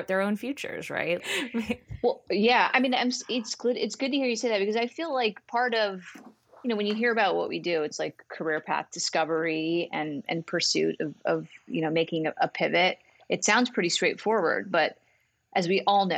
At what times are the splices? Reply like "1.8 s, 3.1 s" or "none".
1.2 s